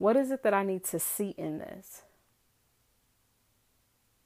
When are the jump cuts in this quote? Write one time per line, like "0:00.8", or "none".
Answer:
none